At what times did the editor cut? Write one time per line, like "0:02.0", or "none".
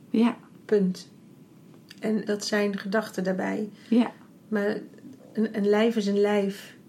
0:02.3